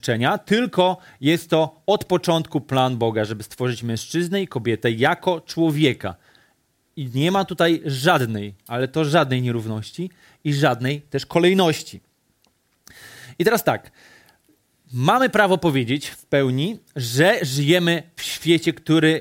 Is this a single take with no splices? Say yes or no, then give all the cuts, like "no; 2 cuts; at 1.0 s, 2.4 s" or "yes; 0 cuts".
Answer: yes; 0 cuts